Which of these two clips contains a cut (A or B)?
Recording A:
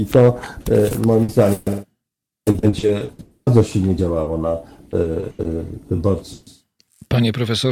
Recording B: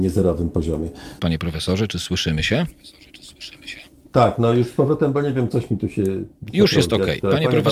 B